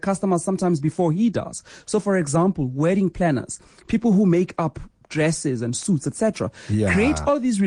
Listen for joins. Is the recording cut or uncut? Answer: uncut